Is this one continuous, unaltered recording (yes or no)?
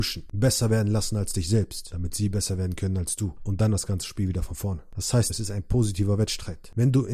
no